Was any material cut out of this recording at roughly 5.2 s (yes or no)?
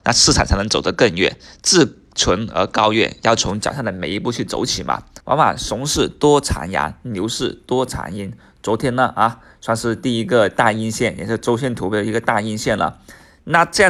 yes